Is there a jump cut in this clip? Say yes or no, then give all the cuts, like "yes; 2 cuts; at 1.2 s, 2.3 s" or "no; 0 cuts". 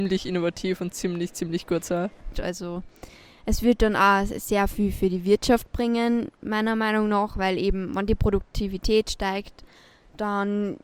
yes; 1 cut; at 2.3 s